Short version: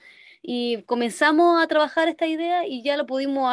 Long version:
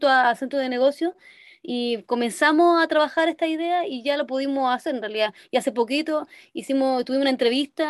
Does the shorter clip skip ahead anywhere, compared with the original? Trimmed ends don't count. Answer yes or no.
no